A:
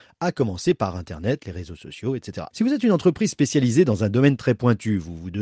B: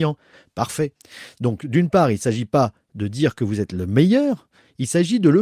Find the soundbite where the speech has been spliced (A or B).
A